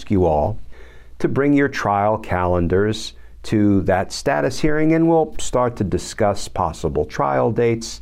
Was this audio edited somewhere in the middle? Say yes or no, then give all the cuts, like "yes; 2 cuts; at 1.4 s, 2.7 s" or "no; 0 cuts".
no; 0 cuts